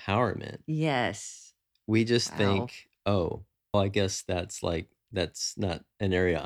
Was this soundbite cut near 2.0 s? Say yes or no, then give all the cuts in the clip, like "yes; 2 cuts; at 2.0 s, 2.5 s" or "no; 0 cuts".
no; 1 cut; at 3.7 s